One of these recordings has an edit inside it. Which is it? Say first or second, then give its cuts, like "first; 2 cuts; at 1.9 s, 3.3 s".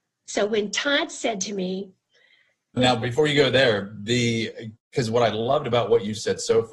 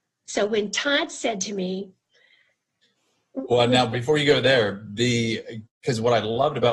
first; 1 cut; at 2.8 s